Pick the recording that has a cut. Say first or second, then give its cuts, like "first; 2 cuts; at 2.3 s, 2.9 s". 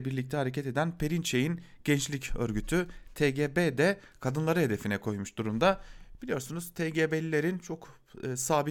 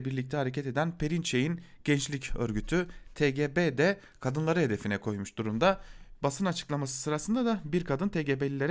second; 1 cut; at 6.1 s